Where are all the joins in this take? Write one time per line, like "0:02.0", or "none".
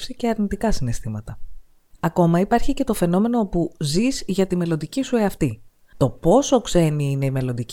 0:05.9